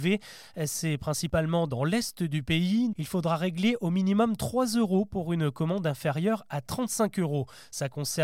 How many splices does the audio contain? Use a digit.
1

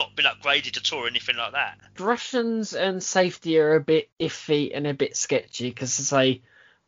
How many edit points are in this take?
2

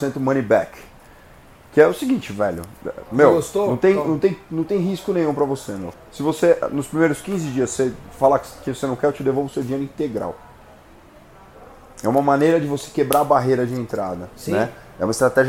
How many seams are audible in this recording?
1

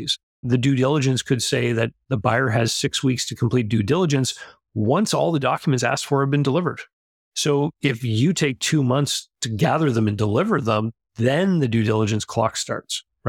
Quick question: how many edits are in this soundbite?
0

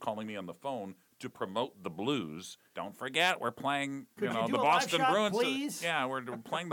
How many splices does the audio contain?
2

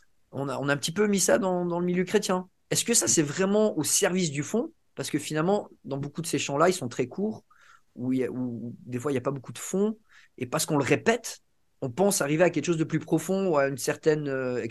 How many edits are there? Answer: 1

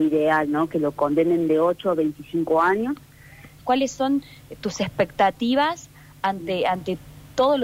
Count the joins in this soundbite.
1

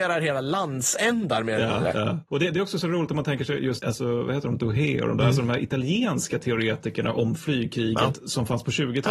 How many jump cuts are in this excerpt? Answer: 1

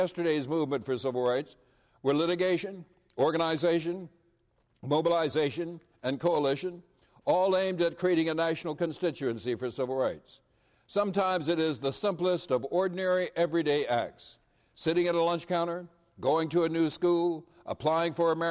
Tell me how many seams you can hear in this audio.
0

